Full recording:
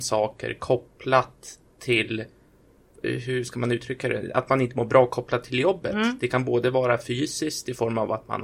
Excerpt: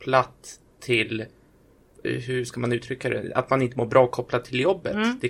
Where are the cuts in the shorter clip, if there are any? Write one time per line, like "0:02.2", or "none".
none